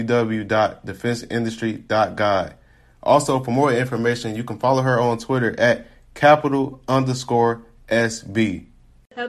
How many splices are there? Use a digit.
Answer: 0